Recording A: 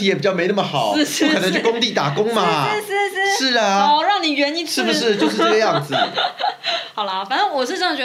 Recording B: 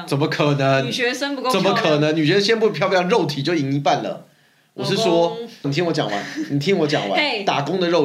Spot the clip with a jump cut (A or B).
B